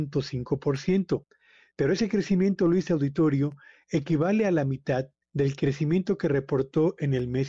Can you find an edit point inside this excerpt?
yes; 1 cut; at 5.3 s

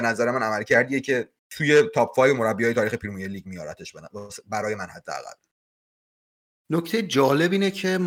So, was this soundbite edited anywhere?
no; 0 cuts

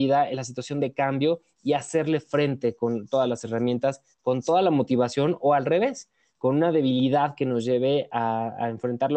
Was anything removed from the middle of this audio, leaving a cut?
no; 0 cuts

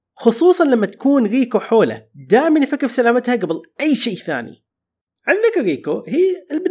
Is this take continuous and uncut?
yes; 0 cuts

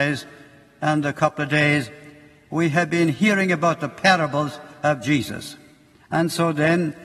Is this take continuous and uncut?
no; 1 cut; at 6.0 s

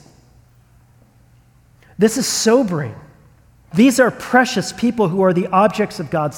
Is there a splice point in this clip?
yes; 1 cut; at 3.7 s

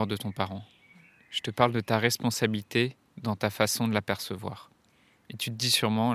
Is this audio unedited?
yes; 0 cuts

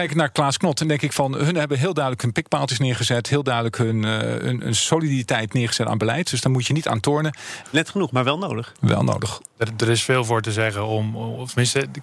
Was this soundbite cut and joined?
yes; 1 cut; at 7.6 s

